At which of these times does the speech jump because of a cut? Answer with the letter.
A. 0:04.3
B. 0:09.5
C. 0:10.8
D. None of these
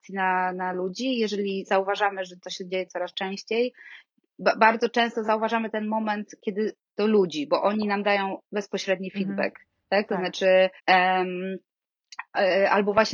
C